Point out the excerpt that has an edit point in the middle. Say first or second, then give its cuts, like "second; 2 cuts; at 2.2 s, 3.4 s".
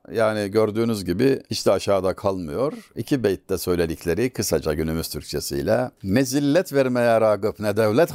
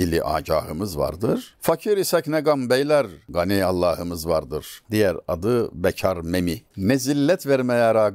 second; 2 cuts; at 4.8 s, 6.7 s